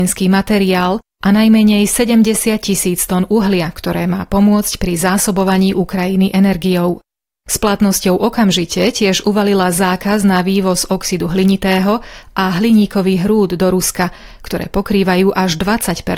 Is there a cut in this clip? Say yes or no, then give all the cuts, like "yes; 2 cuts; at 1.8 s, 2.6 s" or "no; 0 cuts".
no; 0 cuts